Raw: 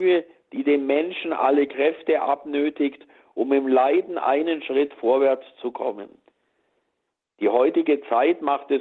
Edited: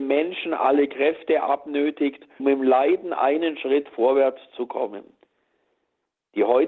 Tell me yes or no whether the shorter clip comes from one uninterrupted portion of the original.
no